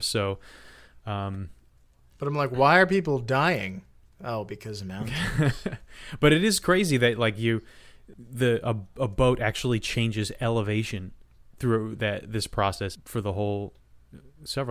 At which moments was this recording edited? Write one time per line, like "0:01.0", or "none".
0:08.1
0:13.0